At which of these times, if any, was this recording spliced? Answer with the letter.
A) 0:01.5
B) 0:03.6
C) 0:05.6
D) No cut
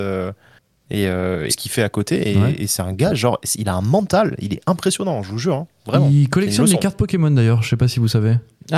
A